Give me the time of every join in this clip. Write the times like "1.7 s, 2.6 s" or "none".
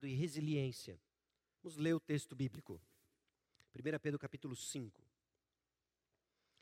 1.5 s